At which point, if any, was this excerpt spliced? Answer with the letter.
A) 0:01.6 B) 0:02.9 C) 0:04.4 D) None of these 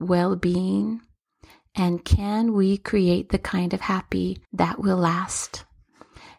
C